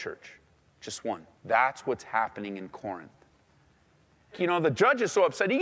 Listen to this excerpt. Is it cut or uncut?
cut